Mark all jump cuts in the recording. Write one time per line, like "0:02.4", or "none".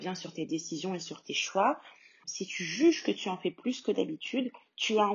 0:02.2